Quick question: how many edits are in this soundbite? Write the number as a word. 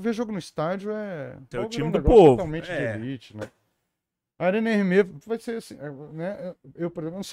two